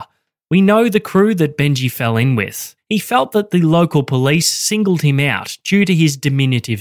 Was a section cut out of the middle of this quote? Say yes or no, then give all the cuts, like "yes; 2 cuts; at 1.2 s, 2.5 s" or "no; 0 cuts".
yes; 1 cut; at 2.8 s